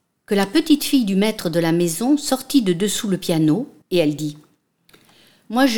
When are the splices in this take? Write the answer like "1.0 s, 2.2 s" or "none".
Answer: 3.8 s

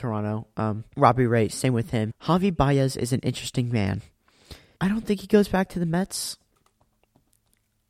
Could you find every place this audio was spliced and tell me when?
0.9 s, 2.1 s, 4.8 s

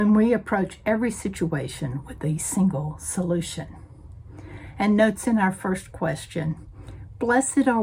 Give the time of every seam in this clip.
none

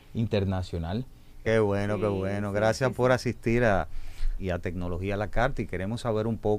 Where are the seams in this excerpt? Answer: 1.4 s, 4.4 s

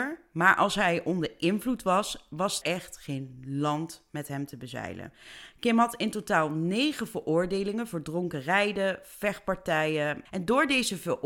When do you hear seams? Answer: 2.6 s, 10.3 s

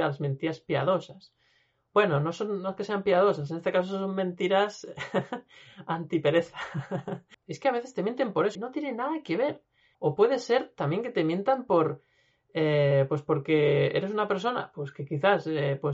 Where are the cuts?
7.3 s, 8.6 s, 9.9 s

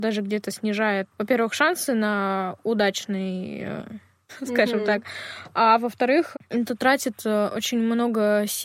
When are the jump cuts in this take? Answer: 1.1 s, 4.3 s, 6.3 s

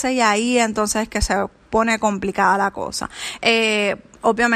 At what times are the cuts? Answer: 3.4 s

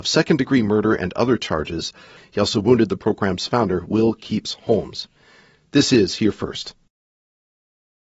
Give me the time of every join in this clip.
2.2 s

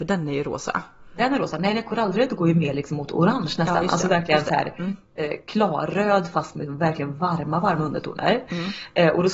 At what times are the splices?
none

